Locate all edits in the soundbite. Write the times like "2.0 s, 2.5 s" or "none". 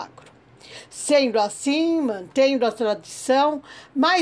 none